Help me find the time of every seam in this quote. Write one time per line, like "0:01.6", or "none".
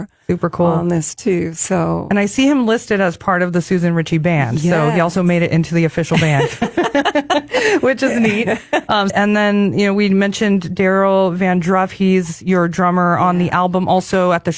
0:09.1